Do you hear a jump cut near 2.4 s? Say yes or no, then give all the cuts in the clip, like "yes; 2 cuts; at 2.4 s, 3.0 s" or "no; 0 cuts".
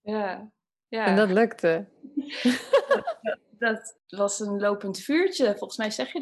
no; 1 cut; at 4.0 s